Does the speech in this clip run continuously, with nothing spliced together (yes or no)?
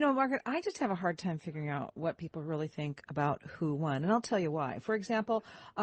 yes